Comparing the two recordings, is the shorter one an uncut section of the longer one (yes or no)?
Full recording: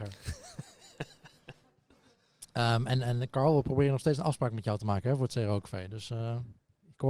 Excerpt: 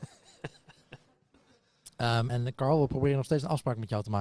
no